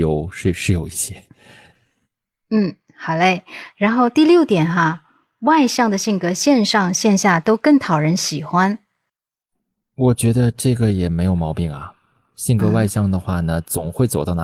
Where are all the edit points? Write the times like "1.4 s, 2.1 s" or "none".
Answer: none